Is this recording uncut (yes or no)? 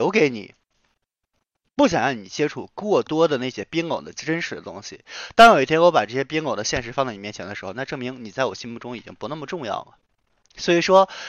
yes